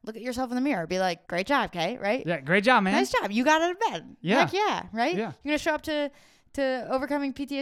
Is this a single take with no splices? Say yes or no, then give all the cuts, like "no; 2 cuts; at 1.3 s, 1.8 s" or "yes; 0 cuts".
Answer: no; 1 cut; at 1.2 s